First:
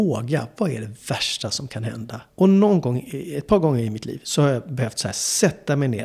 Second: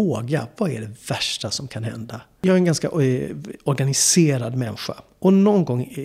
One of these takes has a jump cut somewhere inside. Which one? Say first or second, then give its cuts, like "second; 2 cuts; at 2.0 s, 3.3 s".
first; 1 cut; at 2.3 s